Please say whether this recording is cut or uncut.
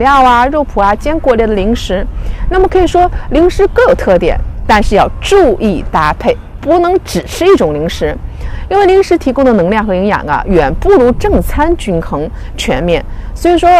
uncut